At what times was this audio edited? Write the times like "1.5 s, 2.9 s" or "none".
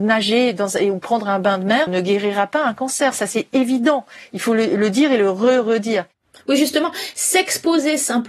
1.9 s